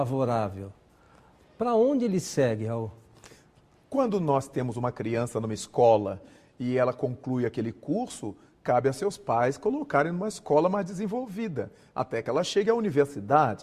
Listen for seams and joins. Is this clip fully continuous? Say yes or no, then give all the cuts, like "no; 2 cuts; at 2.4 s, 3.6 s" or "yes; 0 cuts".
yes; 0 cuts